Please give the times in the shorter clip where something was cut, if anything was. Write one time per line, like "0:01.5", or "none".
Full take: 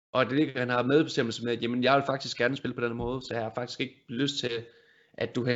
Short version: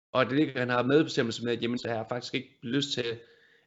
0:01.8